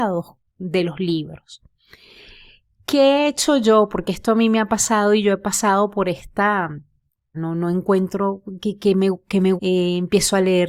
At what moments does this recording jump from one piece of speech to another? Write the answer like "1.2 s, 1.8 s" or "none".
7.3 s, 9.6 s